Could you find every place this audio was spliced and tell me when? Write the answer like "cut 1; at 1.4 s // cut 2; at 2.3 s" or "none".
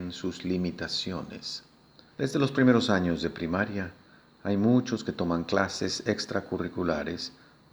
cut 1; at 2.1 s